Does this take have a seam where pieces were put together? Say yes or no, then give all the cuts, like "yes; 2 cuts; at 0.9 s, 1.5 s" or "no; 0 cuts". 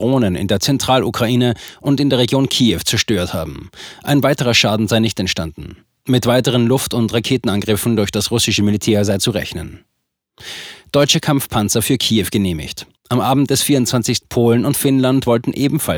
yes; 2 cuts; at 13.0 s, 14.2 s